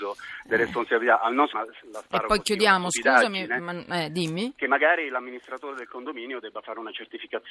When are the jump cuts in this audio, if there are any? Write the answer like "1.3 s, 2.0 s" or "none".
1.5 s